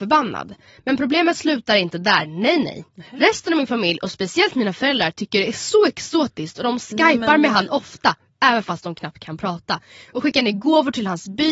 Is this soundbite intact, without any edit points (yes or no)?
yes